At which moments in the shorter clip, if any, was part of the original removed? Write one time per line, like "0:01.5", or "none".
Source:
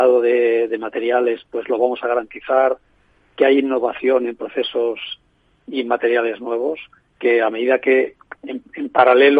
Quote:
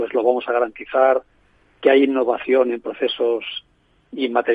none